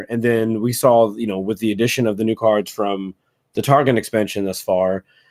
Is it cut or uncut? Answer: uncut